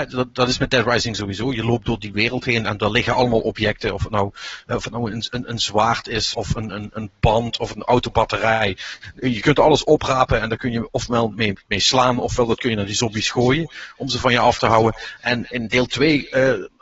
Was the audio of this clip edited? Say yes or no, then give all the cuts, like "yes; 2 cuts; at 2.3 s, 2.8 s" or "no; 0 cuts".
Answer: yes; 1 cut; at 6.3 s